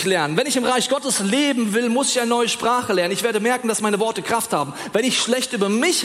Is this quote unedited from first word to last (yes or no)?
yes